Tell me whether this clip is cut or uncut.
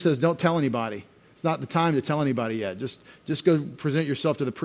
uncut